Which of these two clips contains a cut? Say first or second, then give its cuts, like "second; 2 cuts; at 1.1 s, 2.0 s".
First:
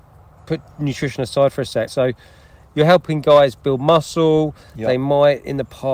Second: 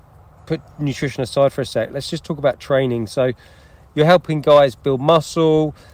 first; 1 cut; at 1.9 s